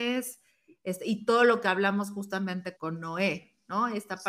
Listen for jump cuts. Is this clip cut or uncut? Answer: cut